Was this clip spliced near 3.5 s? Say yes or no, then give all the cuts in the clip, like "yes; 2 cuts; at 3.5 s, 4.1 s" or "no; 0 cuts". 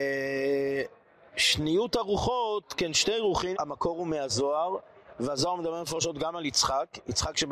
yes; 1 cut; at 3.5 s